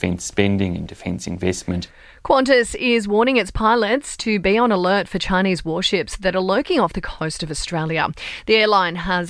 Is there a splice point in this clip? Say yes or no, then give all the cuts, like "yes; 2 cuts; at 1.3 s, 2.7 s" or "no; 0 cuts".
no; 0 cuts